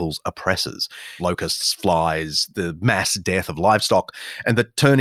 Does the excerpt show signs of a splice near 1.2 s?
yes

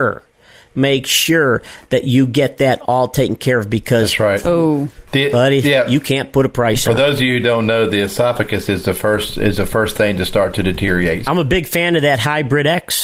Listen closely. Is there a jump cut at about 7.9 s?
no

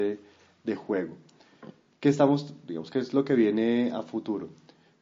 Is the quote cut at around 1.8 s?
no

